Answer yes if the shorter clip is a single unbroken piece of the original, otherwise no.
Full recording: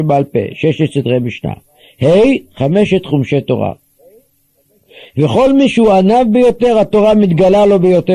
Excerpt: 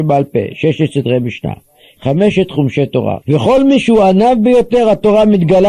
no